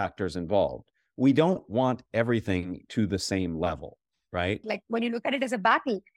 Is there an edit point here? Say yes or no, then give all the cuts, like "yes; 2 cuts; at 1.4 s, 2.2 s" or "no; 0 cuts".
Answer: yes; 1 cut; at 4.6 s